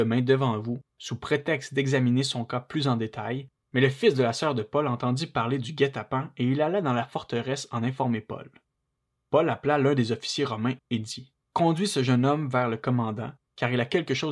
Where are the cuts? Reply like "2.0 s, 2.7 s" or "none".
3.6 s